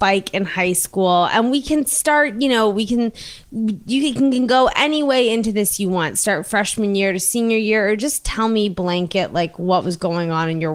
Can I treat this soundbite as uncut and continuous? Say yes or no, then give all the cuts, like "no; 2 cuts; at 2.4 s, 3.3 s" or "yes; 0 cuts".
yes; 0 cuts